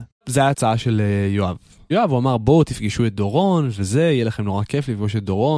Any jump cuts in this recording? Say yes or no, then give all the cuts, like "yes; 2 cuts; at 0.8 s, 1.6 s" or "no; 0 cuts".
no; 0 cuts